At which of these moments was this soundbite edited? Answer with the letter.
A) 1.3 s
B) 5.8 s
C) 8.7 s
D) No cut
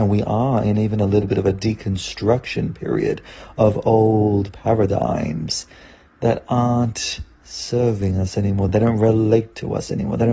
D